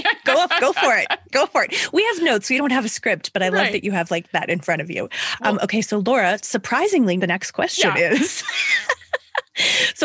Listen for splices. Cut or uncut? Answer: uncut